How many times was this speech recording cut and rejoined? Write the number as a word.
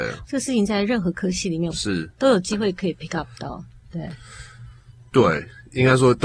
one